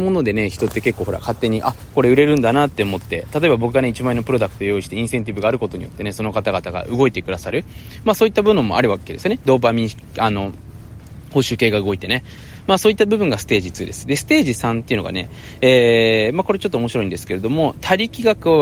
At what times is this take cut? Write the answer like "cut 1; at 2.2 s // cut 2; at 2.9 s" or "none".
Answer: none